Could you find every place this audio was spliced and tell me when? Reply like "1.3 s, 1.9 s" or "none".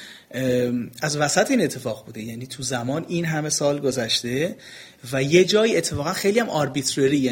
none